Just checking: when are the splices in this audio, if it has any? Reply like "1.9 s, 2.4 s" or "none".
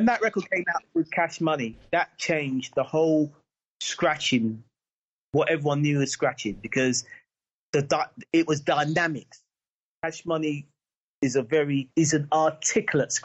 none